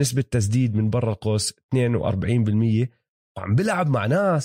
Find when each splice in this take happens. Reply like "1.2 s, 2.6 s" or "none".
none